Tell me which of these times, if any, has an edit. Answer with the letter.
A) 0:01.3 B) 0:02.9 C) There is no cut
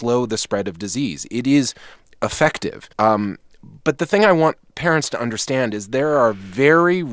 B